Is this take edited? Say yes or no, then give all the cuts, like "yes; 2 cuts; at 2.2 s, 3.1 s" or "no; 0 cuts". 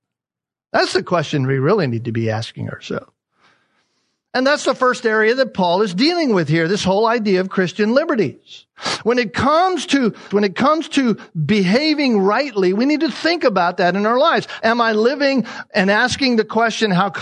yes; 2 cuts; at 10.3 s, 14.6 s